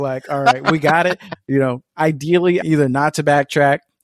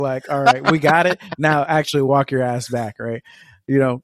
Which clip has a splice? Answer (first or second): first